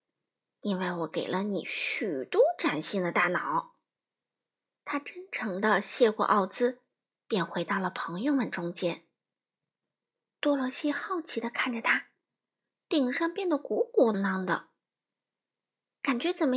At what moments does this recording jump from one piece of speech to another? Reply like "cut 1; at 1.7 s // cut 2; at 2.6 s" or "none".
cut 1; at 4.8 s // cut 2; at 12.8 s // cut 3; at 14.1 s